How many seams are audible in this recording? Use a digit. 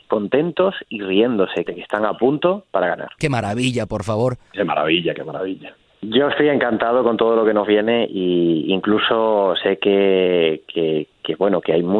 2